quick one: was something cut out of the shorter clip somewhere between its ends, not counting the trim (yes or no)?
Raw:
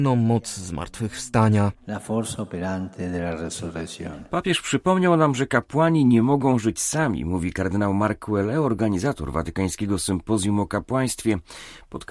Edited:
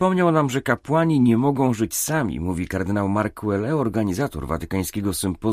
no